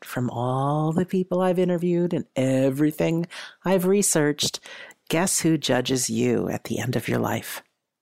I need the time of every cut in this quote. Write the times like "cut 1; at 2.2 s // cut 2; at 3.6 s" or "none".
none